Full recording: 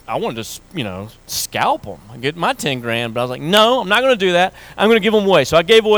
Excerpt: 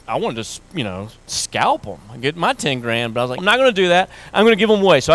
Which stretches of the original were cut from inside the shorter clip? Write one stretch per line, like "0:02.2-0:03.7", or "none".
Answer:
0:03.4-0:03.8